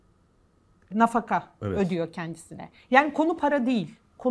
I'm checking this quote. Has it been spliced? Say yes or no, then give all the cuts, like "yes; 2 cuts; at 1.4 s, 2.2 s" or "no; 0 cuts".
yes; 1 cut; at 0.9 s